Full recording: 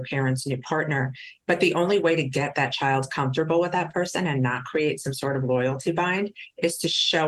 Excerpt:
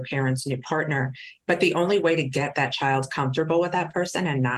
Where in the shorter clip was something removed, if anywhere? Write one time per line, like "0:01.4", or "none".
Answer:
none